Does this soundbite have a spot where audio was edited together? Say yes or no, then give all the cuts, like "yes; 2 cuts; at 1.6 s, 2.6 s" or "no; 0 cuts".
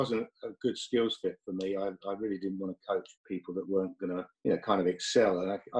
yes; 2 cuts; at 3.2 s, 4.3 s